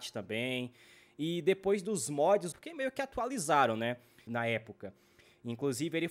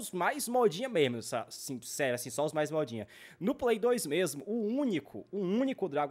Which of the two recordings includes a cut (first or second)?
first